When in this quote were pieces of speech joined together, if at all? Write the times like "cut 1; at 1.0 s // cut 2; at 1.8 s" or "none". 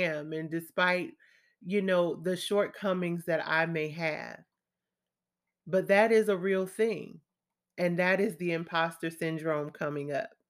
none